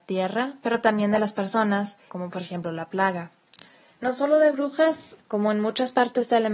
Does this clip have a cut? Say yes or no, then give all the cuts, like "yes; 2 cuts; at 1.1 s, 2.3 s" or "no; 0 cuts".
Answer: yes; 3 cuts; at 2.1 s, 3.9 s, 5.2 s